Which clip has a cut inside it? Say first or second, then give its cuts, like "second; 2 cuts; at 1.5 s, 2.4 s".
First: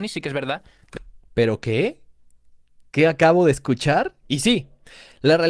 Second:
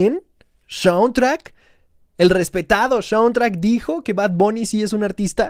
first; 1 cut; at 4.2 s